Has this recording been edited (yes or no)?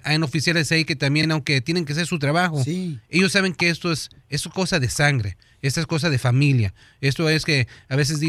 no